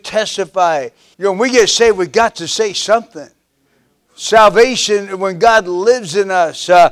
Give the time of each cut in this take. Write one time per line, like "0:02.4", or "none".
0:01.1